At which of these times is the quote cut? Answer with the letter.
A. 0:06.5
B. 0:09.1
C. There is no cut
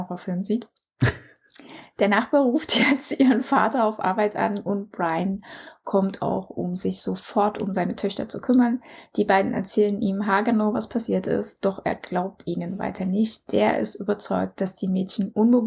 C